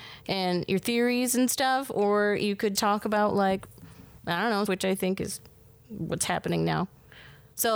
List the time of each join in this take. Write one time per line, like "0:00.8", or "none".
0:02.7
0:04.7

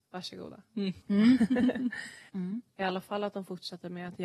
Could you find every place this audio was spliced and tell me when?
0:01.0
0:02.3

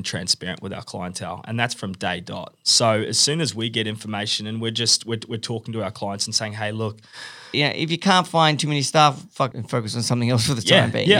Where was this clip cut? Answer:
0:07.5
0:09.5

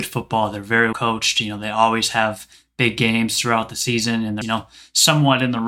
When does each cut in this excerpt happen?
0:00.9
0:04.4

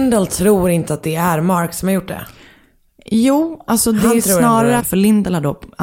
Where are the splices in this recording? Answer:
0:04.8

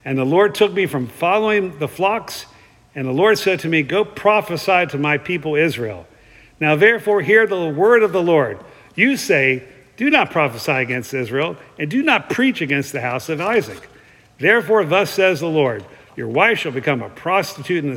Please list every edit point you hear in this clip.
none

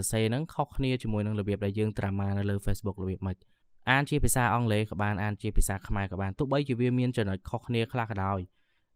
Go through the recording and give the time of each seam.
none

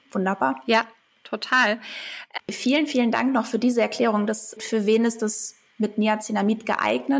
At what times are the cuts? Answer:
0:02.4
0:04.6

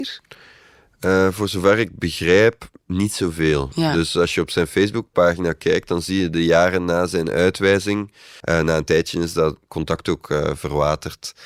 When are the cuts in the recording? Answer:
0:08.4

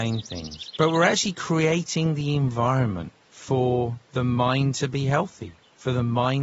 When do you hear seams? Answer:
none

